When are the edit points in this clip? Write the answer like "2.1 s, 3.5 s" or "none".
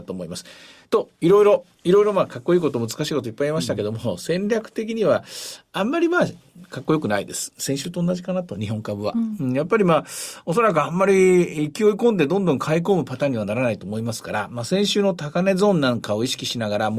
1.7 s